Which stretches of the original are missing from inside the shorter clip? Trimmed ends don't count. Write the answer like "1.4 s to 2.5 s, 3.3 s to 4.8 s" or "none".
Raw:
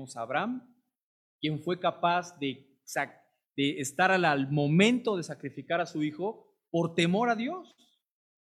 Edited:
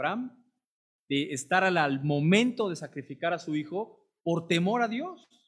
1.3 s to 3.5 s